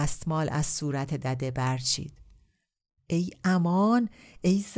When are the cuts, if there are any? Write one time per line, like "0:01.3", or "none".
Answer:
0:03.0